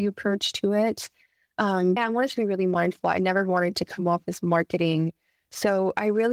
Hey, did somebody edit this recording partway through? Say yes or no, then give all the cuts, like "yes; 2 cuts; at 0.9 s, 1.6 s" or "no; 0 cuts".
yes; 1 cut; at 2.0 s